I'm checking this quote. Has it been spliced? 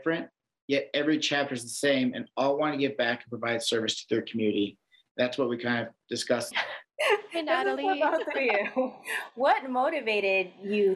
yes; 1 cut; at 6.5 s

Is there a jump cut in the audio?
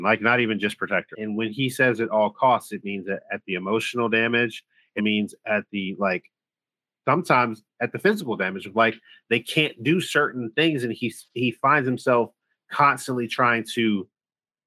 yes; 2 cuts; at 1.1 s, 5.0 s

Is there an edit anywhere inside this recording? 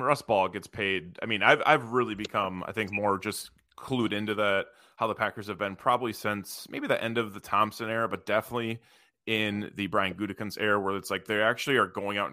no; 0 cuts

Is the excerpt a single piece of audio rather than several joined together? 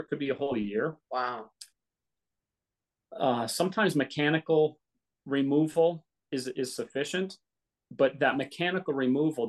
no; 1 cut; at 1.0 s

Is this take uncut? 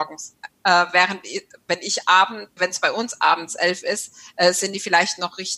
no; 1 cut; at 2.6 s

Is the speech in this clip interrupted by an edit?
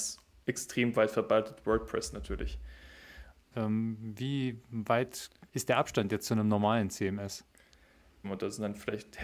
yes; 3 cuts; at 3.5 s, 5.5 s, 8.2 s

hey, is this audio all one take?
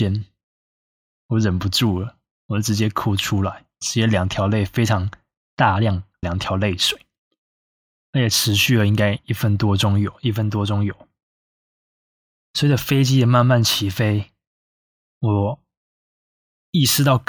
no; 1 cut; at 6.2 s

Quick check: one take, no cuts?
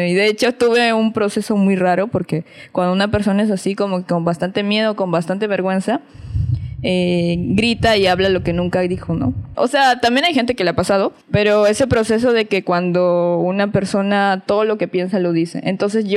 no; 2 cuts; at 9.5 s, 11.2 s

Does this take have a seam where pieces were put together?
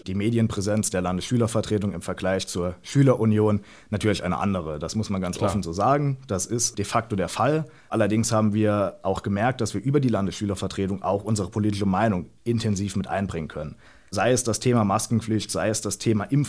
no; 0 cuts

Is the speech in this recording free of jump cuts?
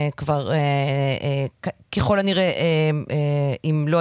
yes; 0 cuts

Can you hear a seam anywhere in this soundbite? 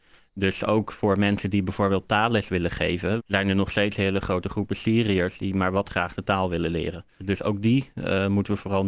yes; 2 cuts; at 3.2 s, 7.2 s

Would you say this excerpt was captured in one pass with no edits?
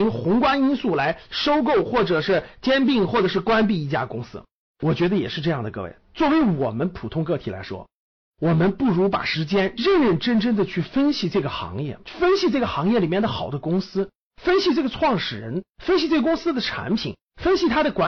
no; 1 cut; at 4.7 s

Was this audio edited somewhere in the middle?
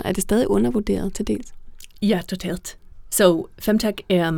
no; 0 cuts

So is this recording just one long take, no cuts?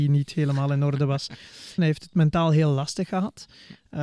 no; 1 cut; at 1.8 s

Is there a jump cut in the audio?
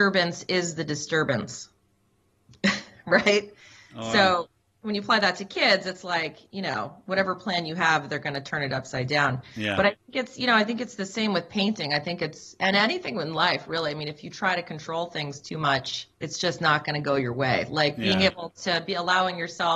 yes; 1 cut; at 16.1 s

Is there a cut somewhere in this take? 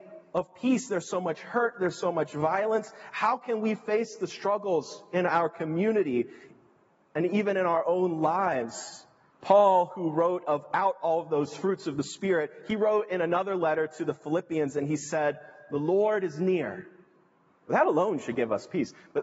yes; 1 cut; at 9.3 s

